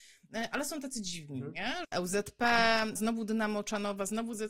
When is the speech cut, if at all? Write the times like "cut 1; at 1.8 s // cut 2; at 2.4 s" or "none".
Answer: cut 1; at 1.8 s // cut 2; at 3.0 s